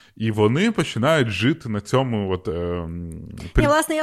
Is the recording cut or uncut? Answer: uncut